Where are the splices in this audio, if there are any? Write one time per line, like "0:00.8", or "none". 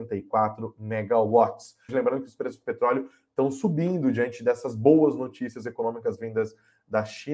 0:01.9

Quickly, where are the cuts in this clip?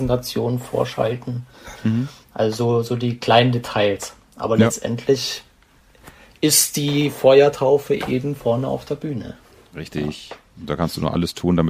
none

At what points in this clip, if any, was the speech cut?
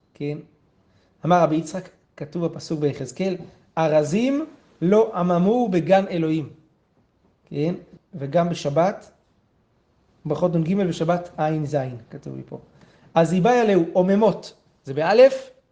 0:08.0

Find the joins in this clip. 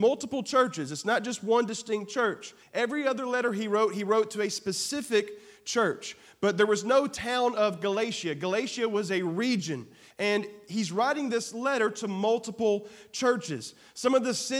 0:02.6
0:10.1

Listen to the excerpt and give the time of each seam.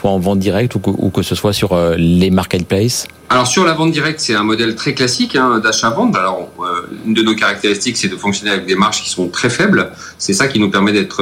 0:03.2
0:06.1

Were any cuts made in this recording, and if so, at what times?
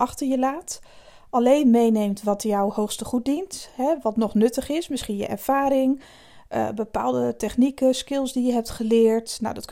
none

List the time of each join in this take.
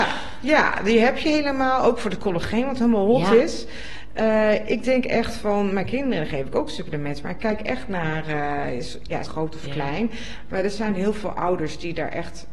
0:09.3

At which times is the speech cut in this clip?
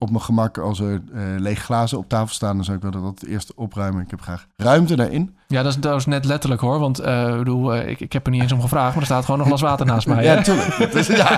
0:04.5

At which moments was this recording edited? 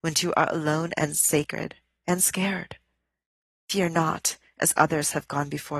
none

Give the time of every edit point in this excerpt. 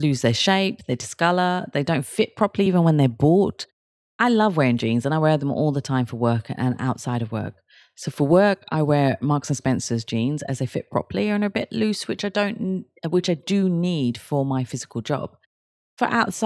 none

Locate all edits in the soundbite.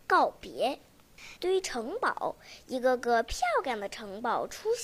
0:01.4

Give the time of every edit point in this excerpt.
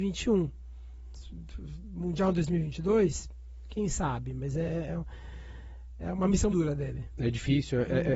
0:06.5

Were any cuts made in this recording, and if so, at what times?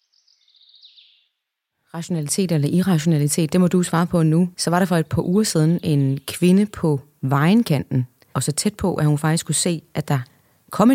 0:04.5
0:08.3

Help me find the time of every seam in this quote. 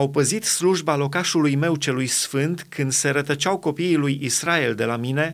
none

